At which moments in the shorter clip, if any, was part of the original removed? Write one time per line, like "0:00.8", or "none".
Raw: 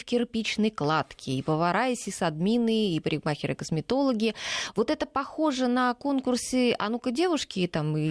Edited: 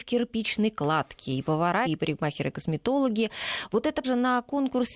0:01.9
0:04.0